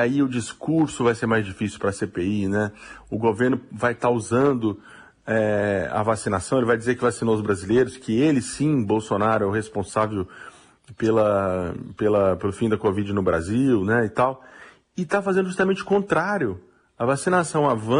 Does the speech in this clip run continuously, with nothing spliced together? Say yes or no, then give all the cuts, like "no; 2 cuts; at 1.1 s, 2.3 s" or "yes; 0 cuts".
yes; 0 cuts